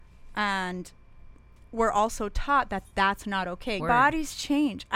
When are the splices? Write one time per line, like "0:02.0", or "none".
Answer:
0:03.8